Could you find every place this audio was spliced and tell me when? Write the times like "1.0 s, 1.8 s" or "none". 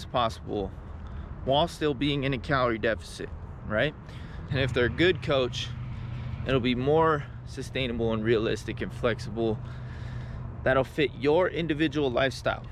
4.5 s